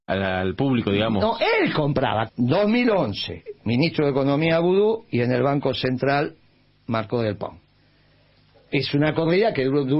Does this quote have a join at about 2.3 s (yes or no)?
yes